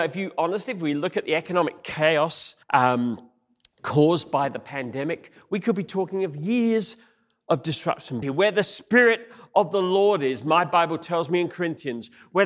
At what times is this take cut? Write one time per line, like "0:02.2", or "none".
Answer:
0:02.6
0:08.2